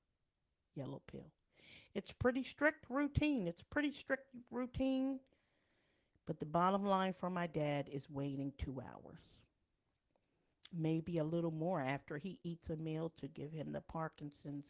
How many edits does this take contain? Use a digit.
0